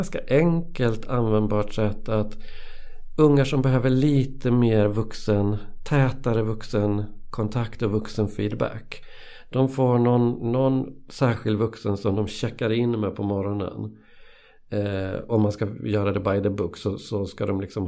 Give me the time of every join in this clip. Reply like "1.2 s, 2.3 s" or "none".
15.3 s